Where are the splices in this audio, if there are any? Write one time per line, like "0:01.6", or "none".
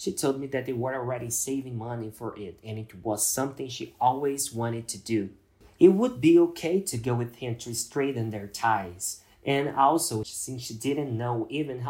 0:10.2